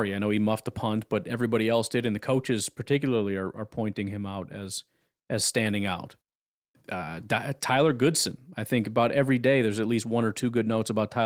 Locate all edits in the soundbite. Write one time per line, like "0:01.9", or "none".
none

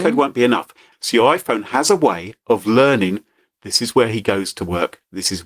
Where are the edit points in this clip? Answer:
0:00.9

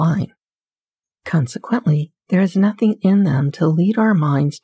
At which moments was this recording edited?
0:01.0
0:02.2

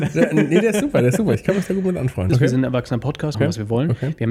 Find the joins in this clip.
0:02.3
0:03.3

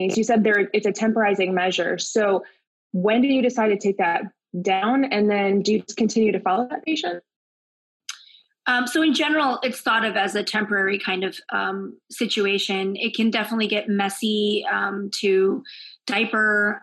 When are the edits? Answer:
none

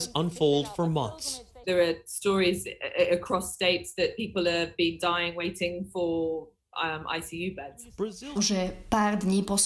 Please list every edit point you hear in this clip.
0:01.6
0:08.4

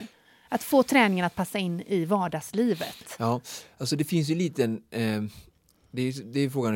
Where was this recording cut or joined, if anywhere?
none

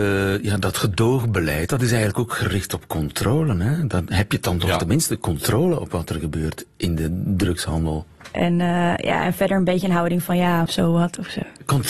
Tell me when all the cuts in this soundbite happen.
0:08.3
0:10.7

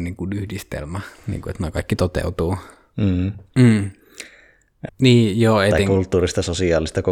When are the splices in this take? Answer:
0:03.5
0:04.9

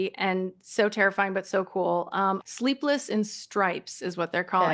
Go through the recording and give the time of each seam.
0:02.4

